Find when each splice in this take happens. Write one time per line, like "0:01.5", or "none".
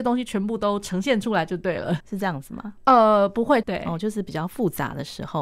0:02.0
0:03.6

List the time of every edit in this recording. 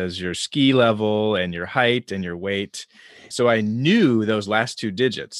0:03.3

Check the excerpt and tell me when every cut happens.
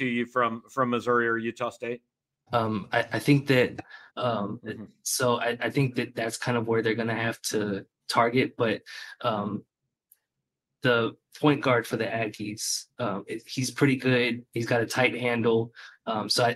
0:02.5
0:04.1

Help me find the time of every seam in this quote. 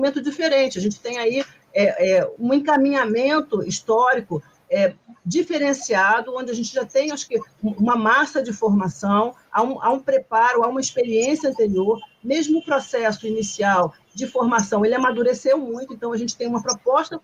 0:02.3

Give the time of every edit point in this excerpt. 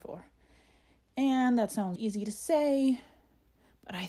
0:02.0

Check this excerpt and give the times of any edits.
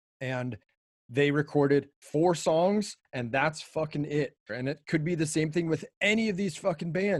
0:04.5

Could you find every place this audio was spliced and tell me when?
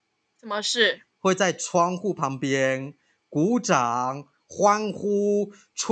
none

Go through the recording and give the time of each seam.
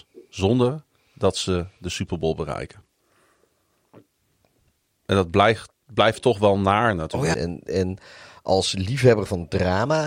0:07.3

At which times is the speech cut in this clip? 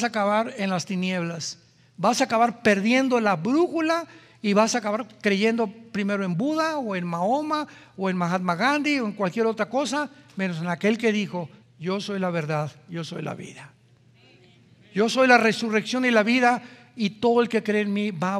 0:11.6

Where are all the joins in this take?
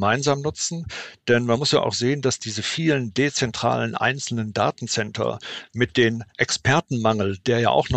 0:06.3

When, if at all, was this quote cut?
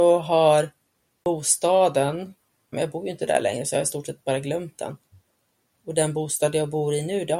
0:02.7

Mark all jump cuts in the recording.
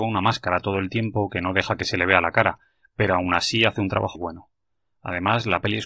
0:04.1

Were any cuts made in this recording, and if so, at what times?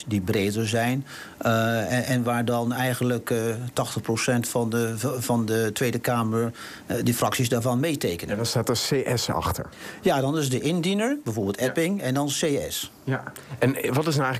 none

